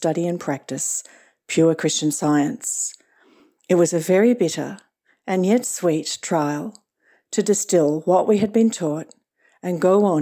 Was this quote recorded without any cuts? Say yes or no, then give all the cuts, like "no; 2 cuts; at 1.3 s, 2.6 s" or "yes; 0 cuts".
yes; 0 cuts